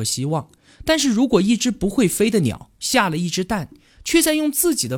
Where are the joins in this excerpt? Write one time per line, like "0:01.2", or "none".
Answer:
none